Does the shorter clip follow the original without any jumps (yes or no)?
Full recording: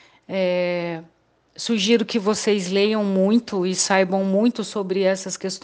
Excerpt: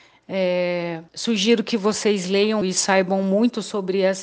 no